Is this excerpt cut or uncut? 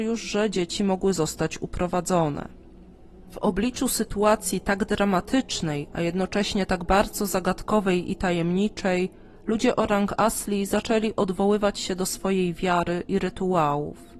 uncut